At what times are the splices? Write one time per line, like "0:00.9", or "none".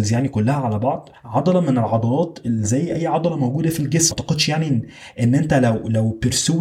none